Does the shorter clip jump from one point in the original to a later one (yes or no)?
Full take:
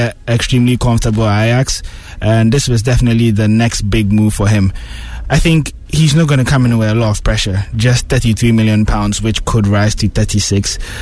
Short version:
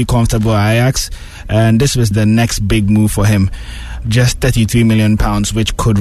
yes